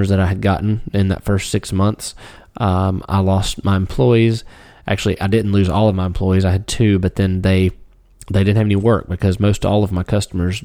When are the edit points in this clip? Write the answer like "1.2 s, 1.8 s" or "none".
none